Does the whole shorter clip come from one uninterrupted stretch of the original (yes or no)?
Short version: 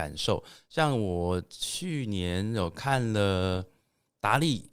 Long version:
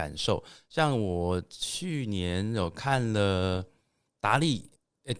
yes